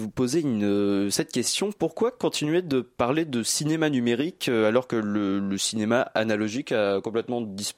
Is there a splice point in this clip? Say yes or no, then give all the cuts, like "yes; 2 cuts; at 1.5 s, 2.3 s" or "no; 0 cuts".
no; 0 cuts